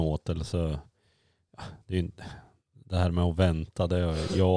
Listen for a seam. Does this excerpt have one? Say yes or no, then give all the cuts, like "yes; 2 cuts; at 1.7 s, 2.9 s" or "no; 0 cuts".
no; 0 cuts